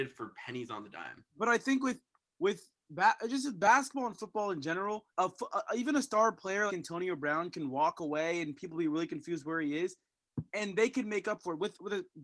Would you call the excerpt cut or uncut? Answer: cut